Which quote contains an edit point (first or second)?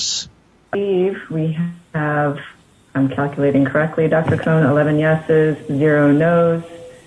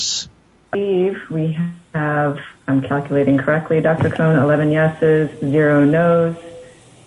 second